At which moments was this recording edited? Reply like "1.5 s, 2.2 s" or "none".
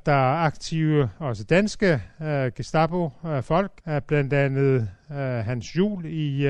3.8 s

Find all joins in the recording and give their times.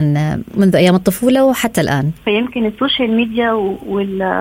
2.2 s

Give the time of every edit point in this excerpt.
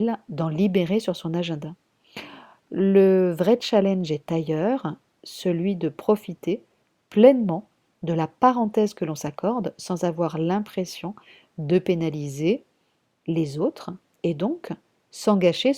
none

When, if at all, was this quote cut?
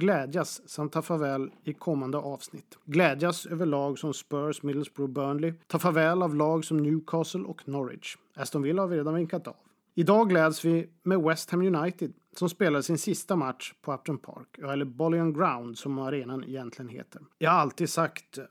9.9 s, 17.3 s

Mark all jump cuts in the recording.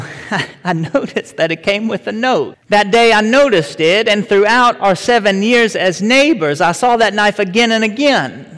2.5 s

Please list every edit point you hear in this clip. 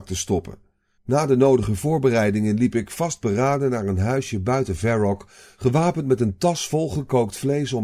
1.0 s

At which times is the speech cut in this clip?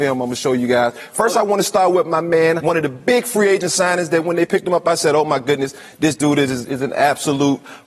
2.6 s

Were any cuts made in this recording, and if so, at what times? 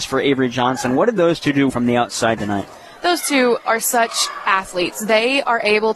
1.7 s

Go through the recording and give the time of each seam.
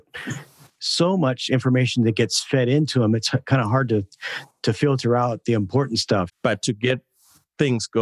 6.3 s

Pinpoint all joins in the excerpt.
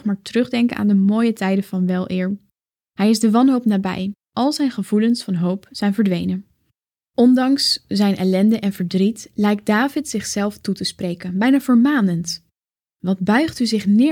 none

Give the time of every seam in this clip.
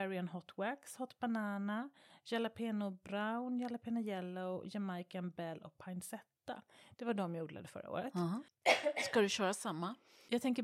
none

